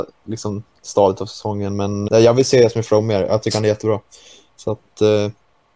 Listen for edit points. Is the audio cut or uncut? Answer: cut